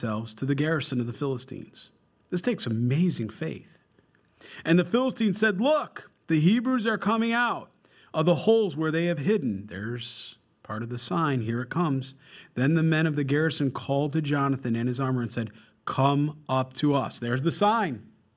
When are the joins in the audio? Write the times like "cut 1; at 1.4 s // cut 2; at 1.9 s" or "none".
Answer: none